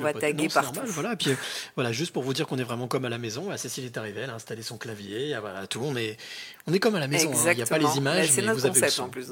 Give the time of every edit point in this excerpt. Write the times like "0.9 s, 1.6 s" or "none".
none